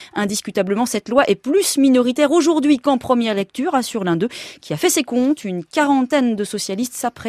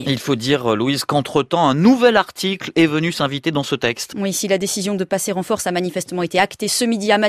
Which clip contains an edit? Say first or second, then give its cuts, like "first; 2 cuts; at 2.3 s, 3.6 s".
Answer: second; 1 cut; at 4.1 s